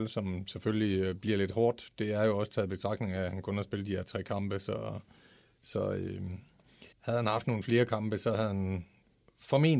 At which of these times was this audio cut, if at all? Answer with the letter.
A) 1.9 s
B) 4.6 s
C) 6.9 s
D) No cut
C